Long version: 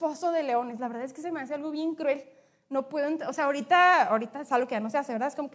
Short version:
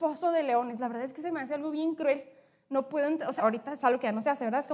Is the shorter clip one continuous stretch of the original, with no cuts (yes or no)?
no